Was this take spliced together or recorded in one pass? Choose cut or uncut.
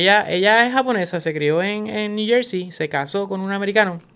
uncut